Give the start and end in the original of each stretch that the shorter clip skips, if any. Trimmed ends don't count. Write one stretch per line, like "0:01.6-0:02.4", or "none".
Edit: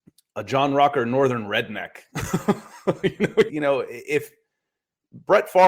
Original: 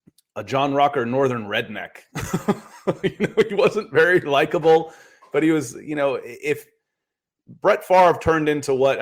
0:03.5-0:05.8